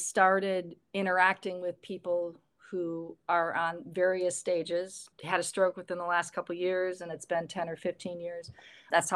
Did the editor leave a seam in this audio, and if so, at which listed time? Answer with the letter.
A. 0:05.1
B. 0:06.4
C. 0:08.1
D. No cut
A